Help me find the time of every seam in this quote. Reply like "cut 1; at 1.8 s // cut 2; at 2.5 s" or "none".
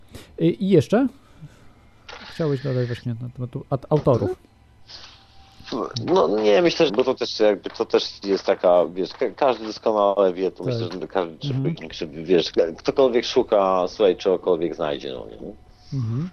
cut 1; at 6.9 s // cut 2; at 11.8 s